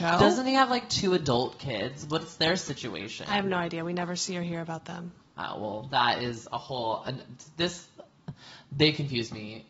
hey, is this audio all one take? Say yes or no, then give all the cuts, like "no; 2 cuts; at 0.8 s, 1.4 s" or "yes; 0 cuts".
yes; 0 cuts